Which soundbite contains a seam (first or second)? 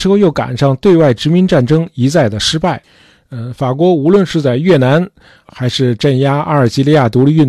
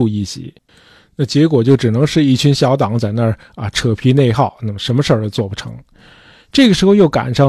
first